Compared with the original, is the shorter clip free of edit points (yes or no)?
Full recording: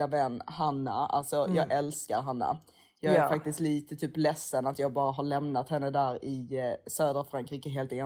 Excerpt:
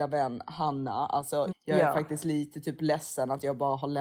no